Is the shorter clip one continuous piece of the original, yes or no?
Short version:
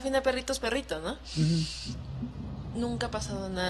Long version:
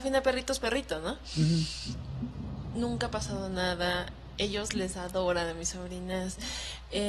yes